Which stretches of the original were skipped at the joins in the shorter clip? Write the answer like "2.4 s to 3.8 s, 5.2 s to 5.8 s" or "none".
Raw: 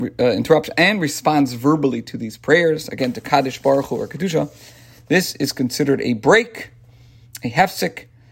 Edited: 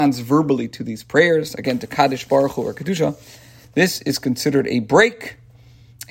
none